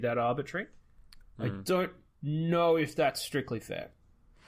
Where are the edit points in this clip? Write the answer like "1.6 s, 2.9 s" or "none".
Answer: 1.2 s